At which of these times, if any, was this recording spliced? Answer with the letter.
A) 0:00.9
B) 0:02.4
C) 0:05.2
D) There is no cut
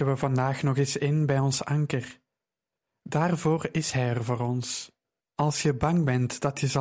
C